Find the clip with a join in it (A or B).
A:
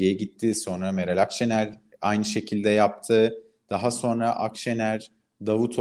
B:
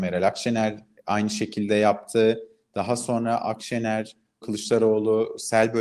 B